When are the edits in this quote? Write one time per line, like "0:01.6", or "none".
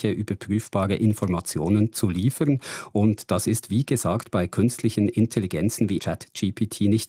0:06.0